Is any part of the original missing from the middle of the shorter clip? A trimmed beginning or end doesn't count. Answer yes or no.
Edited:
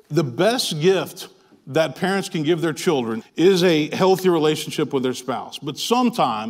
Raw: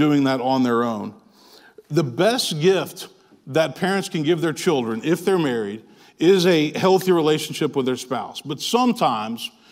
yes